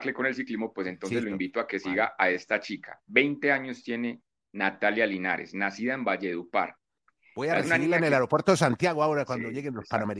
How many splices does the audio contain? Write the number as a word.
zero